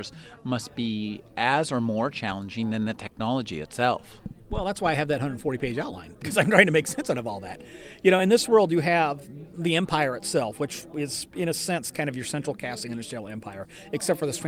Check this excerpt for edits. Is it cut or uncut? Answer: uncut